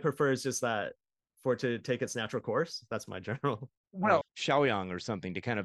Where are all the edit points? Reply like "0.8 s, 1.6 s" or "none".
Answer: 4.2 s